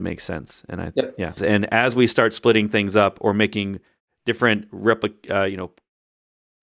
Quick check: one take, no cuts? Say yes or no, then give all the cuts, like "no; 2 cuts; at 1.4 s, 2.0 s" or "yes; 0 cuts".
no; 1 cut; at 1.4 s